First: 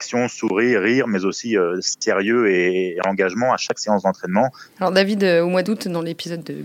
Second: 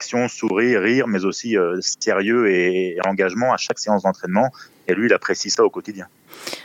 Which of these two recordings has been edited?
first; 1 cut; at 4.8 s

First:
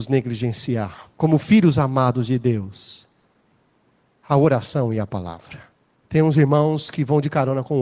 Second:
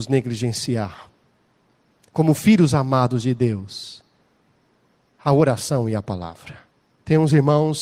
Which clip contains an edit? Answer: first; 1 cut; at 1.1 s

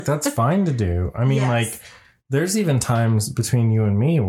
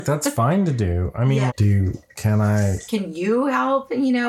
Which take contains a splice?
second; 2 cuts; at 1.5 s, 2.8 s

